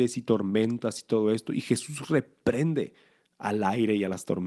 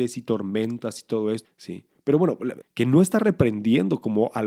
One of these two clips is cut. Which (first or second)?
second